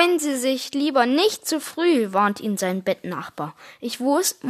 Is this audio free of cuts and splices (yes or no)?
yes